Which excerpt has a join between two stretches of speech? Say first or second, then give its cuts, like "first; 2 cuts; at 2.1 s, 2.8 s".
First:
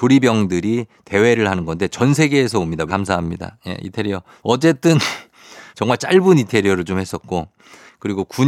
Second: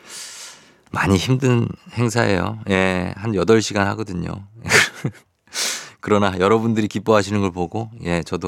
first; 3 cuts; at 2.9 s, 4.4 s, 5.7 s